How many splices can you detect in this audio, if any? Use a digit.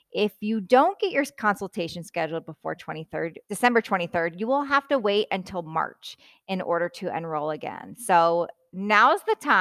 1